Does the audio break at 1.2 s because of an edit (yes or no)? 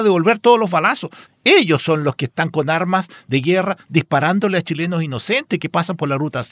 yes